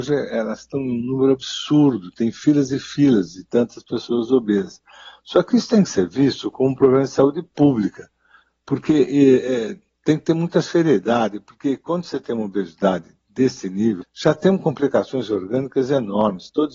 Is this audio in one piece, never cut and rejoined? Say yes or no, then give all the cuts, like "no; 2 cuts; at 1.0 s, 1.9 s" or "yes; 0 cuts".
no; 1 cut; at 14.0 s